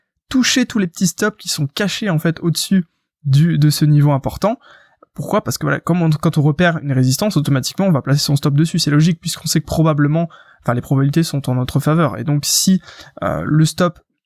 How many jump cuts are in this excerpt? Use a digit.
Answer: 0